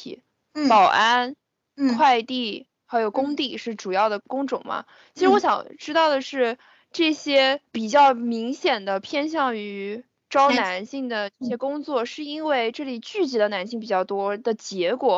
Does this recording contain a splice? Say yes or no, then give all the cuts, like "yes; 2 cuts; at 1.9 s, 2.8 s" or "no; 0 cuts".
yes; 2 cuts; at 4.2 s, 7.7 s